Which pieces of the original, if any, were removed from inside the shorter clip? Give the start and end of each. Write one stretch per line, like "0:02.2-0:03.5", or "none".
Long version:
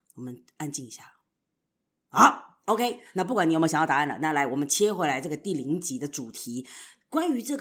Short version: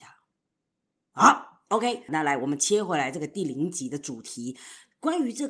0:03.1-0:04.2